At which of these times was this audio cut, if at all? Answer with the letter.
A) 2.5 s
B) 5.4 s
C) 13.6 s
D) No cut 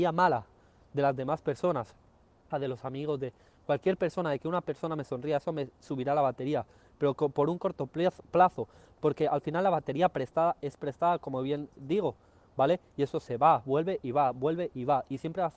A